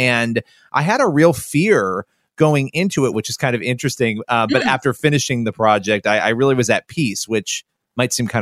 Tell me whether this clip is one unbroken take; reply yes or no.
no